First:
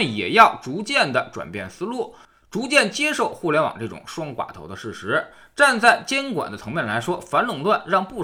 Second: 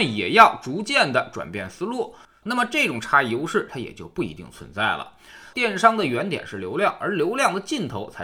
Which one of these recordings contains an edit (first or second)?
second